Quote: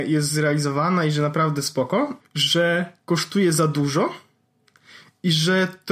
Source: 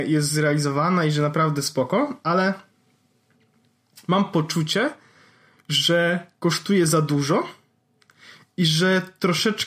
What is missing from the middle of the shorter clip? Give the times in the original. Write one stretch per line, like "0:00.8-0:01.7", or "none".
0:02.2-0:05.5